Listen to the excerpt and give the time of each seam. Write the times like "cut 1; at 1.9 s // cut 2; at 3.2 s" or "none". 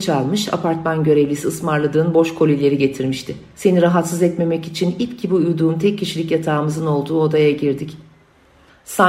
cut 1; at 3.5 s